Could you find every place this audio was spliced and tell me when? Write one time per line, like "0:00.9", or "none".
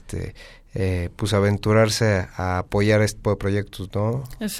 0:03.2

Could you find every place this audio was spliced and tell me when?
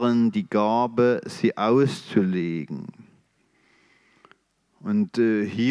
none

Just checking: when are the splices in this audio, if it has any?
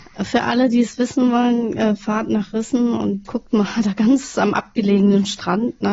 0:03.2

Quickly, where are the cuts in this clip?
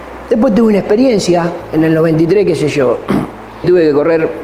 none

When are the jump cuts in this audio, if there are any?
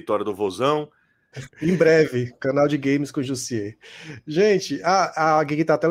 0:01.3

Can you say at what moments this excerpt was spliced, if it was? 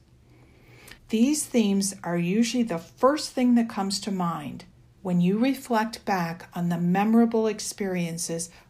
0:01.0

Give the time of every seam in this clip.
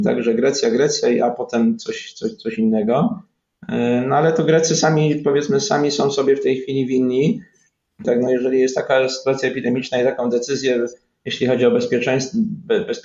0:08.0

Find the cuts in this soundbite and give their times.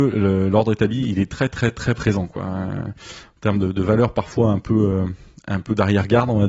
none

